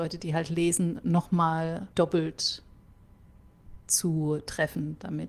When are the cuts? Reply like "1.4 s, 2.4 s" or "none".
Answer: 1.9 s